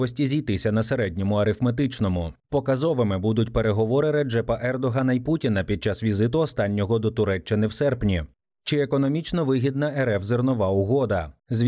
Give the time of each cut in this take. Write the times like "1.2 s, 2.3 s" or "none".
2.4 s